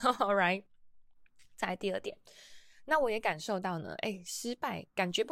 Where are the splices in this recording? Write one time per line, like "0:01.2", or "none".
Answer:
none